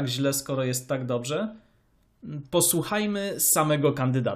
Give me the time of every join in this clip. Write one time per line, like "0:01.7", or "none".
none